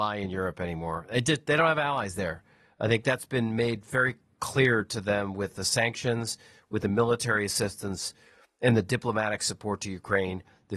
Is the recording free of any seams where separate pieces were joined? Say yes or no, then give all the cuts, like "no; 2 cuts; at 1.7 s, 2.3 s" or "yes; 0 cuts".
yes; 0 cuts